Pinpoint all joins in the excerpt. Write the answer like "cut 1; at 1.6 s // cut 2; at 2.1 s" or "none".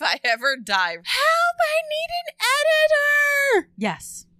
cut 1; at 1.0 s

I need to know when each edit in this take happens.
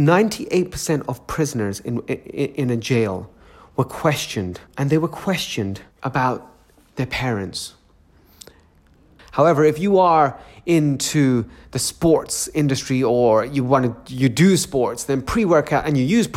cut 1; at 4.7 s // cut 2; at 5.9 s // cut 3; at 9.2 s

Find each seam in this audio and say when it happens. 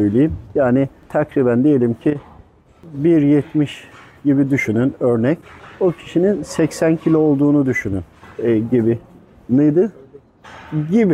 cut 1; at 8.2 s

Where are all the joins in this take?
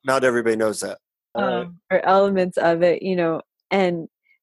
cut 1; at 1.3 s

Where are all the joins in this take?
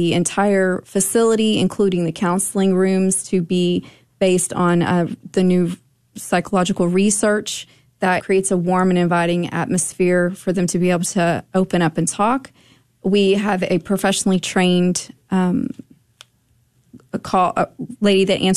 cut 1; at 8.2 s

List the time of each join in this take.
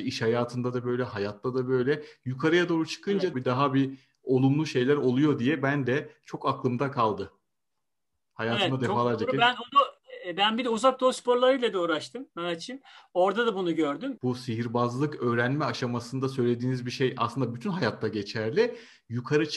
cut 1; at 3.3 s // cut 2; at 14.2 s

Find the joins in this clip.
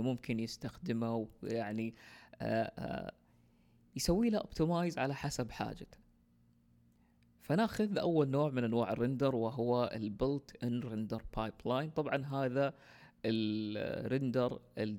none

